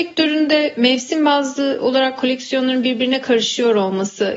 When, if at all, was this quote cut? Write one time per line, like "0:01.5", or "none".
none